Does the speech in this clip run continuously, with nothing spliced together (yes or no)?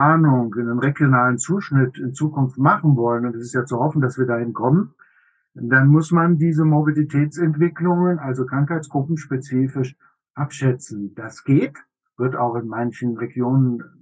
yes